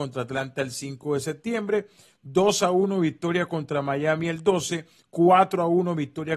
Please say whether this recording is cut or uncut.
uncut